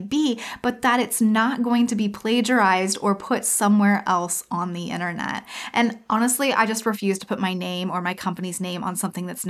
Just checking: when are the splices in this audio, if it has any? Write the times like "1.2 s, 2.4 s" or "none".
none